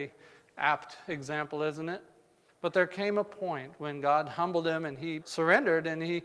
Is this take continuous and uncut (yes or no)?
no